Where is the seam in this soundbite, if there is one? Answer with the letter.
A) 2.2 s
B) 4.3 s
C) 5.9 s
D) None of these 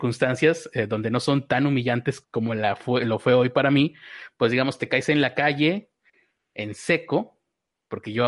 A